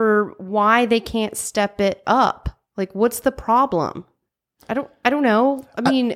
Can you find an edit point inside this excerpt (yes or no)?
no